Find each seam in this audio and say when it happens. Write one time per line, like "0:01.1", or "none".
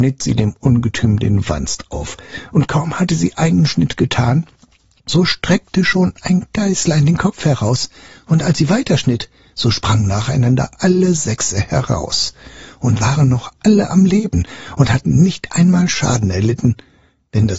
none